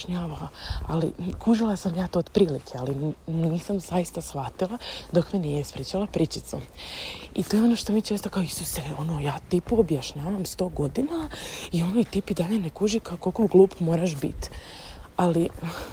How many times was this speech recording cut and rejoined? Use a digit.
0